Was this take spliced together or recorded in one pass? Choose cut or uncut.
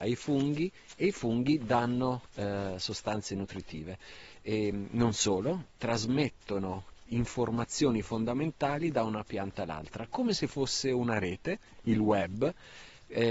uncut